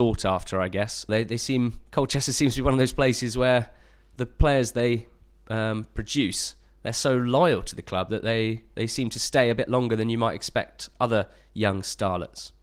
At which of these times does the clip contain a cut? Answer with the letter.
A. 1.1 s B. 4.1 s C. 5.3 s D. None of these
A